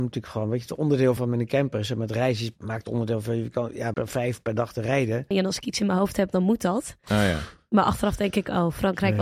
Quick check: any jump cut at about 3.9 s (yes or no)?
yes